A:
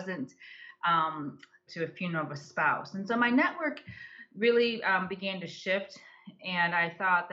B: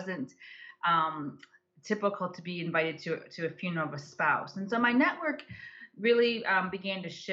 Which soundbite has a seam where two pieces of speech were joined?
A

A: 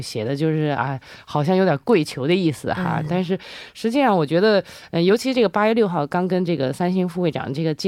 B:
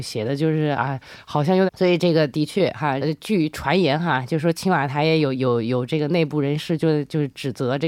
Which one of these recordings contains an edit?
B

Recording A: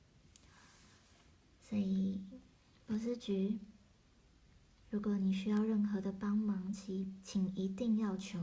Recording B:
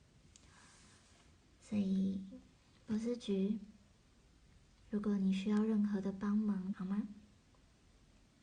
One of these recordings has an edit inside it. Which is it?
B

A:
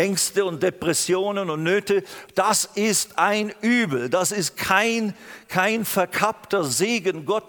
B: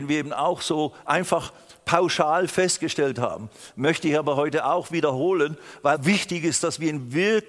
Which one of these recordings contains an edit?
B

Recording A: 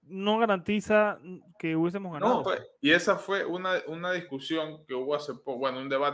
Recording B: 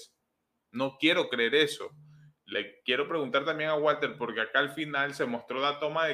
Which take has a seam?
A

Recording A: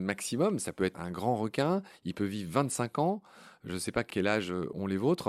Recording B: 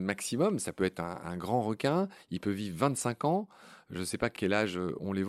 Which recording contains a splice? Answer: A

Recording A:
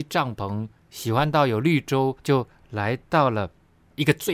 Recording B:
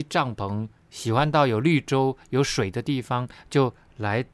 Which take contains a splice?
A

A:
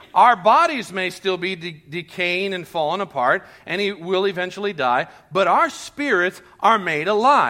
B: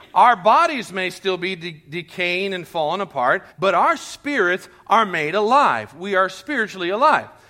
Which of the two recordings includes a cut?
B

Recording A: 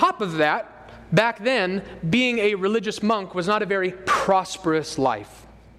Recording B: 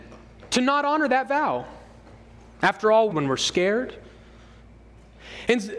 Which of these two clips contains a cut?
B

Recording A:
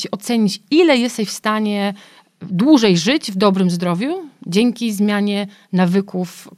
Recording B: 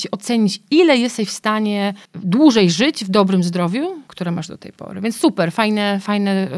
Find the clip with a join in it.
B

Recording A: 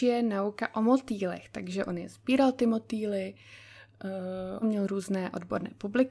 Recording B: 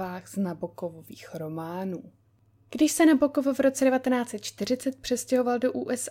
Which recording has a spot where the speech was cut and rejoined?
A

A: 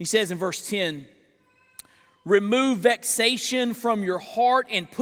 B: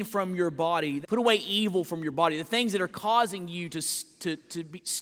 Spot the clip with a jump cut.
B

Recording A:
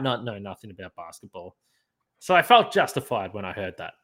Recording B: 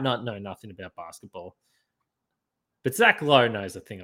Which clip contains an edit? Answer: A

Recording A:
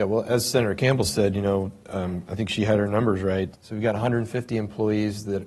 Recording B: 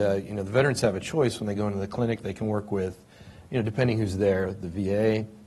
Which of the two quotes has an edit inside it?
A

